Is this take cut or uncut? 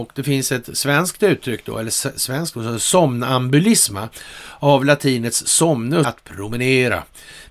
cut